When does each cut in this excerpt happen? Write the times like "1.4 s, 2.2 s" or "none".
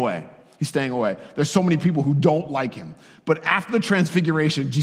none